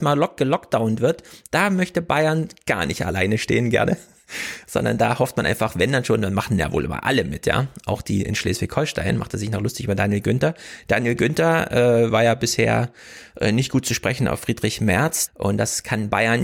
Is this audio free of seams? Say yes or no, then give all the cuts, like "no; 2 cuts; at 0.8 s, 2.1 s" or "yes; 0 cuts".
no; 1 cut; at 15.3 s